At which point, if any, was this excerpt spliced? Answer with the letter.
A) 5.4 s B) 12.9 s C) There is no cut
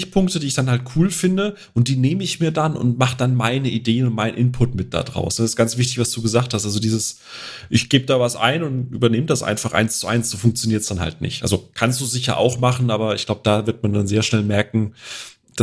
C